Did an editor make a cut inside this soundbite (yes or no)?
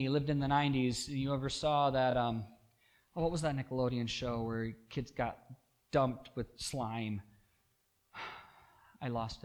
no